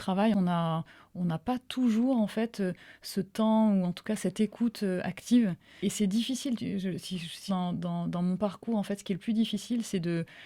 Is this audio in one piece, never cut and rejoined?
no; 2 cuts; at 5.8 s, 7.5 s

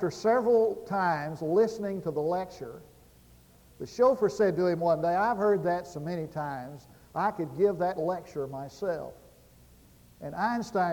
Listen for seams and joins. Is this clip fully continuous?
yes; 0 cuts

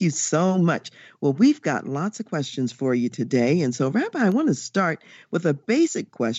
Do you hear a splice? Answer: no; 0 cuts

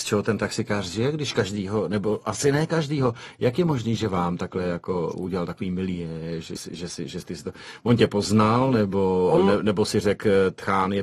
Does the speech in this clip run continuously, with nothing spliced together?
no; 1 cut; at 6.6 s

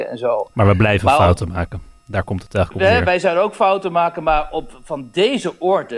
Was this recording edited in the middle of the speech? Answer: no; 0 cuts

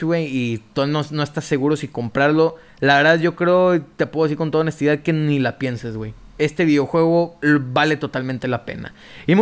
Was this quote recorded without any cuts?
yes; 0 cuts

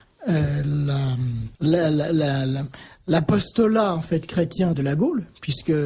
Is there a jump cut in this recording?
yes; 2 cuts; at 1.6 s, 4.7 s

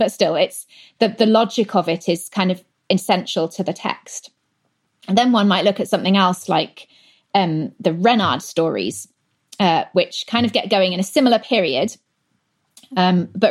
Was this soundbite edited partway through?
no; 0 cuts

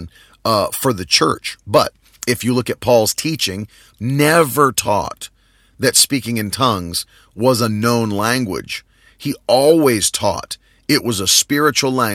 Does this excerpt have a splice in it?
yes; 1 cut; at 3.9 s

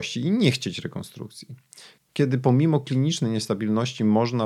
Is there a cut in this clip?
yes; 1 cut; at 2.0 s

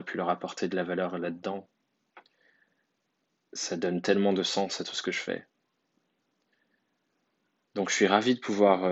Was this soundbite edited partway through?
no; 0 cuts

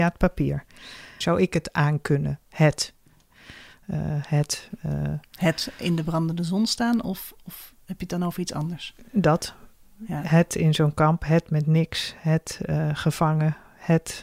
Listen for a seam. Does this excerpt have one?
yes; 1 cut; at 1.2 s

